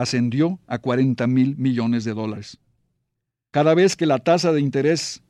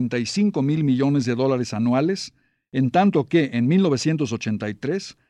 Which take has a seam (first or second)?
first